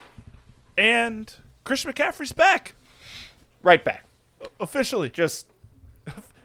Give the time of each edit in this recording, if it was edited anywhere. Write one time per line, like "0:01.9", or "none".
none

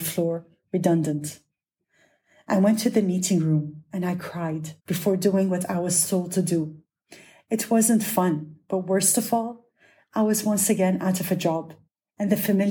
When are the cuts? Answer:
0:04.8

